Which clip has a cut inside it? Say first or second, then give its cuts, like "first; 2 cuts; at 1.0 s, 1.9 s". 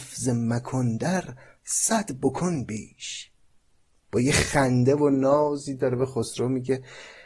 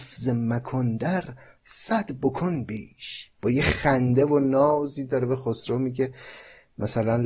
second; 1 cut; at 3.3 s